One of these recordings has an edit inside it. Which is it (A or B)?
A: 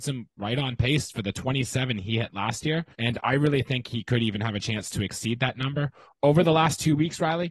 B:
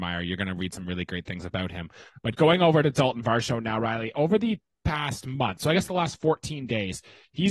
A